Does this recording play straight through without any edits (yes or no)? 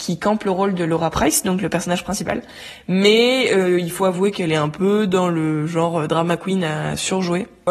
yes